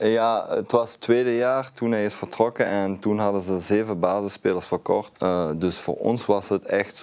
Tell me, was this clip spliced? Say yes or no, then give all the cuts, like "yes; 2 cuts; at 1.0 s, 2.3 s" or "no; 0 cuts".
yes; 1 cut; at 5.1 s